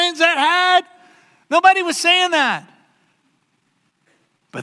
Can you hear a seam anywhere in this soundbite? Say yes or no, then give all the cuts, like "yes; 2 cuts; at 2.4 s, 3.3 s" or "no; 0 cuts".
no; 0 cuts